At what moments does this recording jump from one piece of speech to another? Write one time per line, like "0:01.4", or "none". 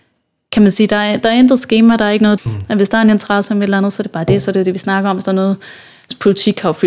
0:02.4